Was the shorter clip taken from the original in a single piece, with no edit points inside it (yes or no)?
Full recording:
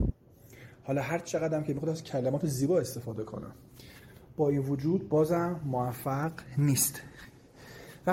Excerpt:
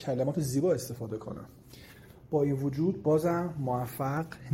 yes